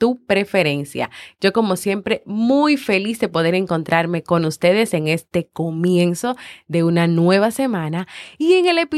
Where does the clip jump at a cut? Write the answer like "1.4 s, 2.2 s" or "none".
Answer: none